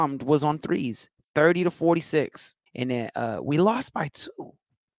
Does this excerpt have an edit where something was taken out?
yes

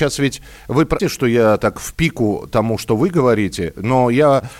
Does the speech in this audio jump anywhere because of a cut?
yes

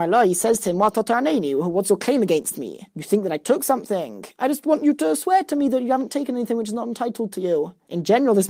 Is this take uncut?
no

